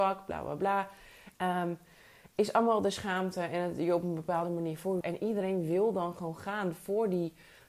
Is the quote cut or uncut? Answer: cut